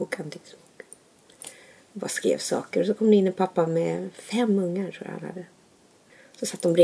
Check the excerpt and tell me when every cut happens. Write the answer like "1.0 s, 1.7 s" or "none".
none